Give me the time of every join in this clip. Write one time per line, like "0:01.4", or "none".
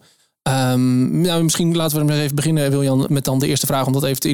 0:03.1